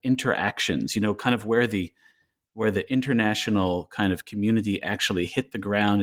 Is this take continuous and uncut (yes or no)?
yes